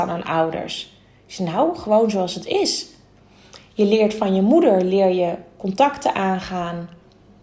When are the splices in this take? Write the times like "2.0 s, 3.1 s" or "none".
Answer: none